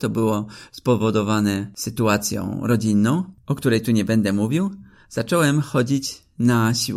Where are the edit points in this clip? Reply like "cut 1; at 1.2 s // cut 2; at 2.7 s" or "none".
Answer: none